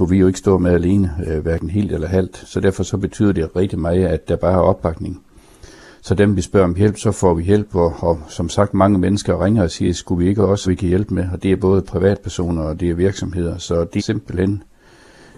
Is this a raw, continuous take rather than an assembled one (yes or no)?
no